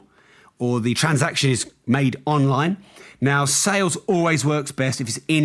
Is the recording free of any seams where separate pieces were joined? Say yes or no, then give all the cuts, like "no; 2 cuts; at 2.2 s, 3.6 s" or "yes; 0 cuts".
yes; 0 cuts